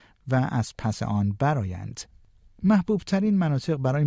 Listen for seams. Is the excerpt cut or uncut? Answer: cut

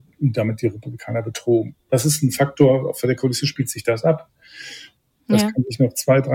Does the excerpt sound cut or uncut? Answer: cut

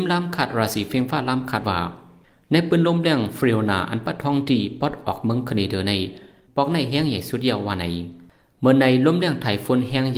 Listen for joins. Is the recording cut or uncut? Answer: cut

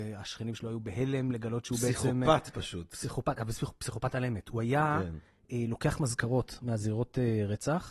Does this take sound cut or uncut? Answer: uncut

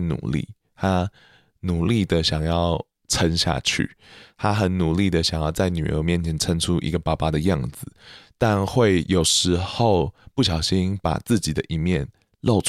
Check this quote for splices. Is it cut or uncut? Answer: uncut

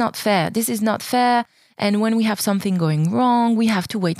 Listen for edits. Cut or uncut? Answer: uncut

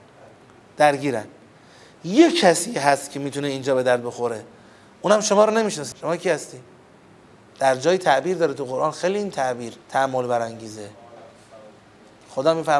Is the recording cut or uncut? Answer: cut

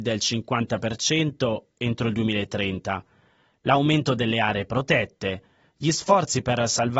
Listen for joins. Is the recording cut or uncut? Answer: uncut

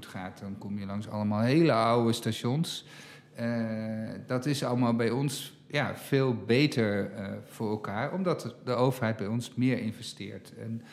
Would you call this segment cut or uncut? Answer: uncut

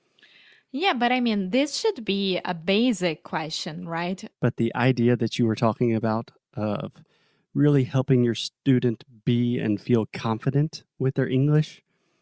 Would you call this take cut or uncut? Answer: cut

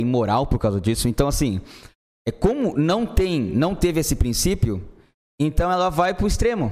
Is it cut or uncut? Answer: uncut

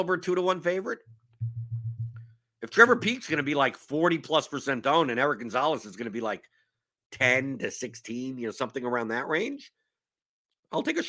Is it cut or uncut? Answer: uncut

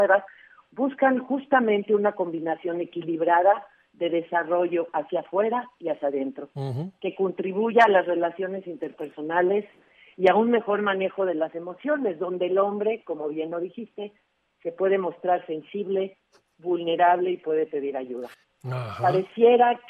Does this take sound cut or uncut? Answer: cut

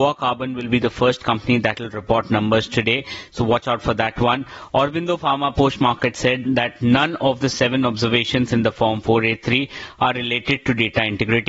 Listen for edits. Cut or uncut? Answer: uncut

